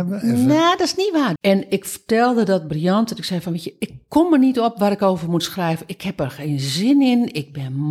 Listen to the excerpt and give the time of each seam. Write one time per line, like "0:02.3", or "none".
0:01.4